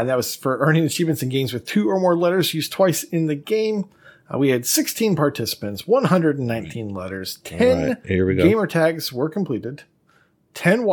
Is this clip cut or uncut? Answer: uncut